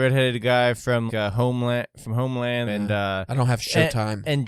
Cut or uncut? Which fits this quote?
cut